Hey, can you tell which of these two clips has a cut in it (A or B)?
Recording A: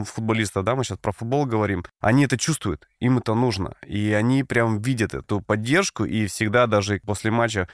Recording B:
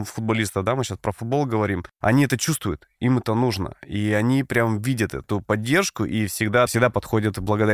B